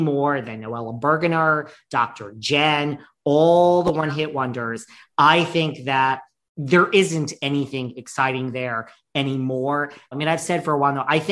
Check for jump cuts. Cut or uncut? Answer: cut